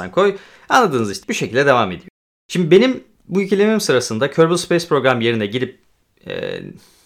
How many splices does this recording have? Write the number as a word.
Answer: one